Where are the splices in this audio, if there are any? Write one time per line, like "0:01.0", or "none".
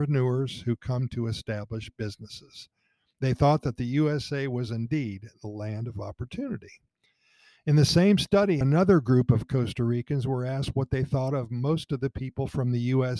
0:08.6